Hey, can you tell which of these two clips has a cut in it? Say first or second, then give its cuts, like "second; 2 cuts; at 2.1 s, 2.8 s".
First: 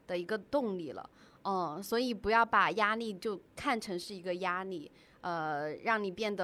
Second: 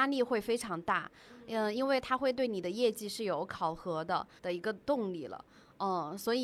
second; 1 cut; at 4.4 s